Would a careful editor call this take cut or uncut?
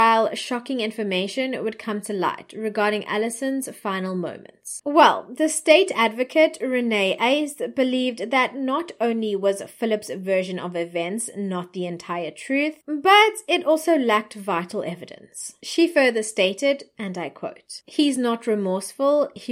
cut